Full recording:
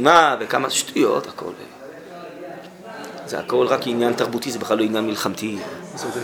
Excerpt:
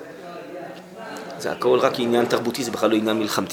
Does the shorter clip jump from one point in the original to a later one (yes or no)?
no